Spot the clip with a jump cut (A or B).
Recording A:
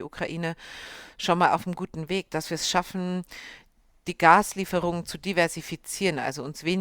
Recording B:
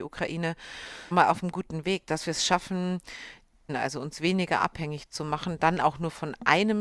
B